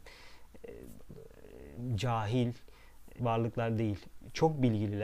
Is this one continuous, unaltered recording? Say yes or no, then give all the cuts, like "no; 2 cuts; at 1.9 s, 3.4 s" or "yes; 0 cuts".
no; 2 cuts; at 1.1 s, 3.2 s